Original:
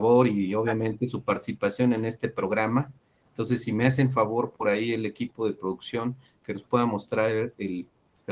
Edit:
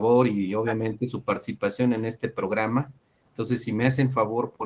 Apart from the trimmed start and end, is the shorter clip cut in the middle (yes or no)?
no